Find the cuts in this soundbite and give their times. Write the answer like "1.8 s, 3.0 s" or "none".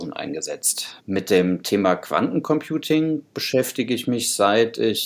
1.0 s